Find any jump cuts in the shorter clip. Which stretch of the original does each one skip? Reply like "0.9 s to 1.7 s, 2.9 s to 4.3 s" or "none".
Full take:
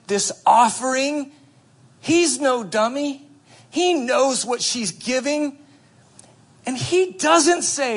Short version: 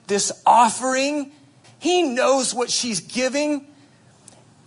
1.6 s to 3.6 s